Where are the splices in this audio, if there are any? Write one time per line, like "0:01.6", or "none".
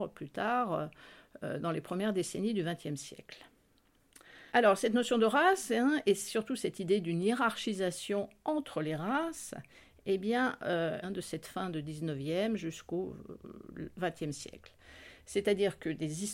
0:04.5
0:11.0